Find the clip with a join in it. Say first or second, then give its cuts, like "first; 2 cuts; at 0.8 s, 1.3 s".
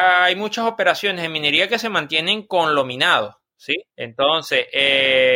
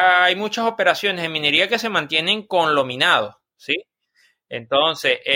first; 1 cut; at 3.9 s